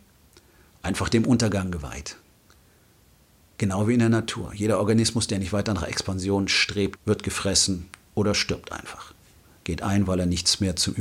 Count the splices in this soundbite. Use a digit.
1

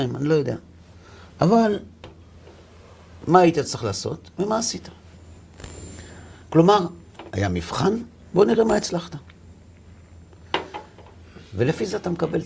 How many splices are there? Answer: 1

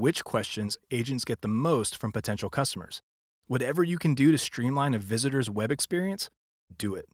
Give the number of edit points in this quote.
1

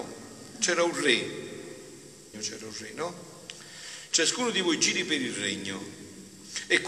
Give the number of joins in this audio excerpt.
2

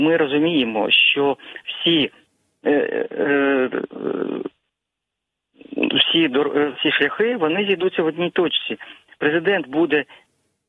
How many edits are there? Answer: 0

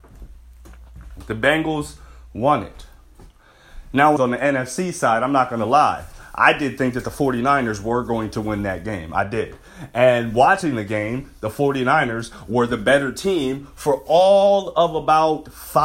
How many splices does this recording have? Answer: 1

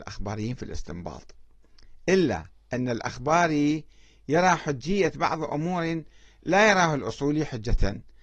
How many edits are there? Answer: 0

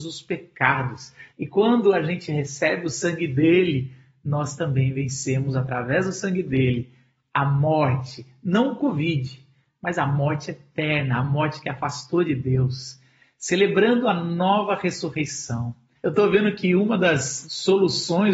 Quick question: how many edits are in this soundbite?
3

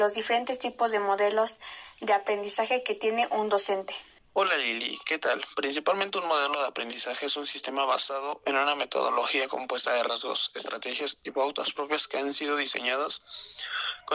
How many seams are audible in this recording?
1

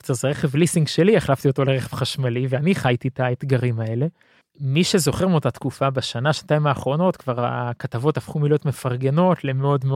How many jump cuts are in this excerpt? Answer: 1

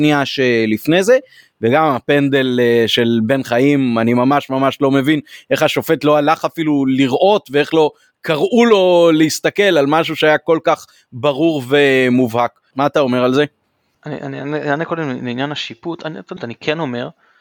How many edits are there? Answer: 2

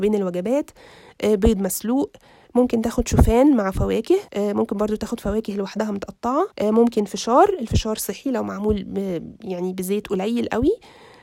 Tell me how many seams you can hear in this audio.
2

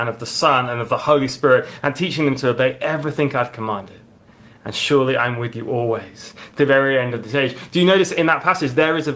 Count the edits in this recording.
0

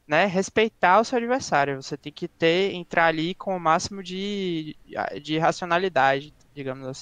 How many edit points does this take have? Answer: 0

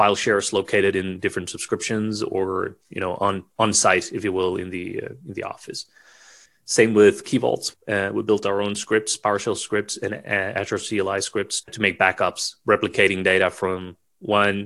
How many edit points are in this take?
3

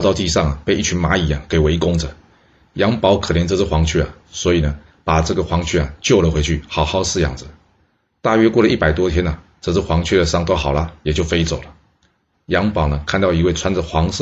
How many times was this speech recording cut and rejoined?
1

